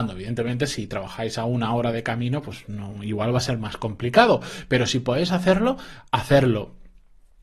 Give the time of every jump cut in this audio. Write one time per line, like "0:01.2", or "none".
none